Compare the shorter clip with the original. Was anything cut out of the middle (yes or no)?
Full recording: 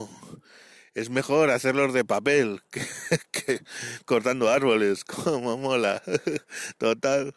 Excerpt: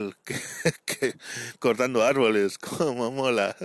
no